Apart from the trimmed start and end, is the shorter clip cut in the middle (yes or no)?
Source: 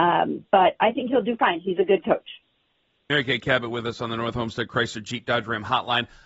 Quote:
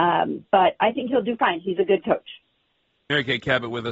no